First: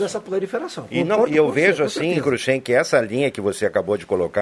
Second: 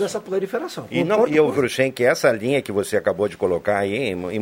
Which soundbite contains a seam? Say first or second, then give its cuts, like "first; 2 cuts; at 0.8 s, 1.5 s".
second; 1 cut; at 1.5 s